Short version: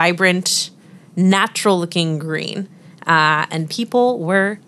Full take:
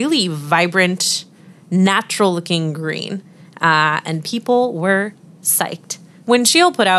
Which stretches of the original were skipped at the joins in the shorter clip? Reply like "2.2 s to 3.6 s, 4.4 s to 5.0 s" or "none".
none